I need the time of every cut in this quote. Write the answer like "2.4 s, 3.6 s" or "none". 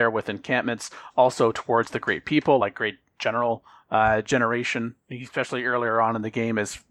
none